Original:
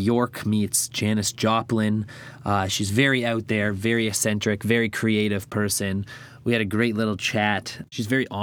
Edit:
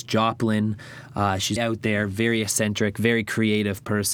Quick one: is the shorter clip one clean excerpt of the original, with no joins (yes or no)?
no